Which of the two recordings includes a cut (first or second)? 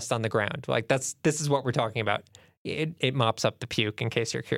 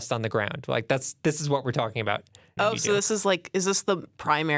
second